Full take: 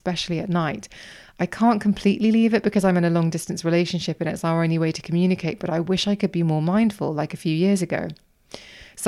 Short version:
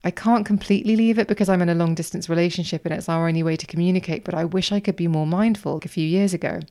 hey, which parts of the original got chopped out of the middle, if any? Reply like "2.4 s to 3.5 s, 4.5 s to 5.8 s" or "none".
7.1 s to 7.3 s